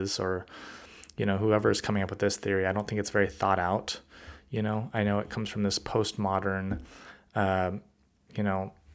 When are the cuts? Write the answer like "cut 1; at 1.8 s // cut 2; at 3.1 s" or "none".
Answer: none